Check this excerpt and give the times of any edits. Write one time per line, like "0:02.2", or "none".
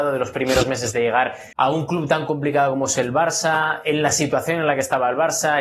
0:01.5